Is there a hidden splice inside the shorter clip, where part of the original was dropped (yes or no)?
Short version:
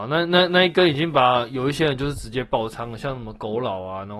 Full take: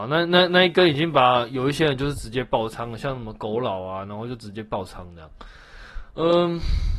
no